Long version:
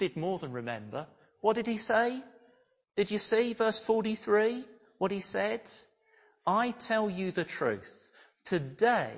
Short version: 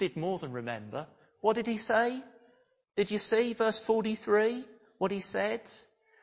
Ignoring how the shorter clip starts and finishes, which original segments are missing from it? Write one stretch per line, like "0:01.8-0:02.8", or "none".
none